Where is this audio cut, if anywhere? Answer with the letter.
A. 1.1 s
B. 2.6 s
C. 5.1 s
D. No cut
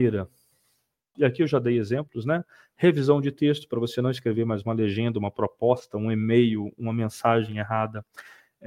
A